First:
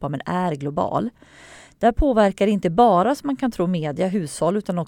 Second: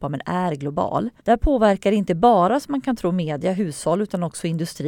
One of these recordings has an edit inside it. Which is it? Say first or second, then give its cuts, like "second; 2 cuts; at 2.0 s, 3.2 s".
second; 1 cut; at 1.2 s